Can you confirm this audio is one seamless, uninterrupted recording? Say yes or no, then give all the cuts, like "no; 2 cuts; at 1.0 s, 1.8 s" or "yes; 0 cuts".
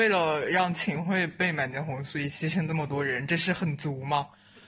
yes; 0 cuts